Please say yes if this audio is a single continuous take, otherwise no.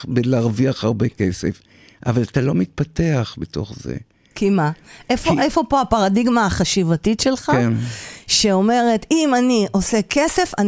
yes